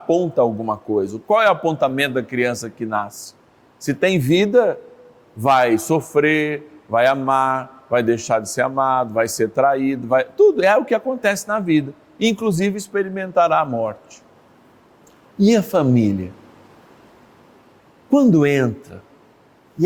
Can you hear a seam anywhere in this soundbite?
no; 0 cuts

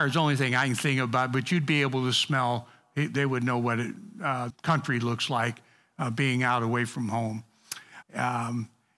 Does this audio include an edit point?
yes; 2 cuts; at 4.5 s, 8.0 s

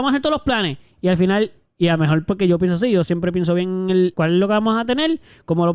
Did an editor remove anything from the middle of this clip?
yes; 1 cut; at 4.1 s

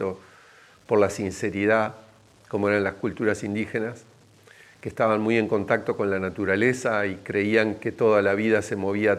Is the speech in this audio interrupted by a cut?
no; 0 cuts

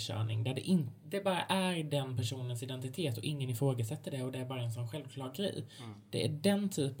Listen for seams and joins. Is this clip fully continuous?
yes; 0 cuts

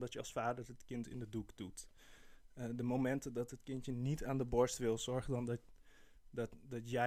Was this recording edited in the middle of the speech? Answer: no; 0 cuts

